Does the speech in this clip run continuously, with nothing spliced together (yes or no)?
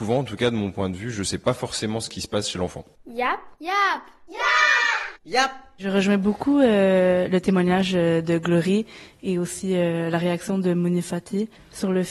yes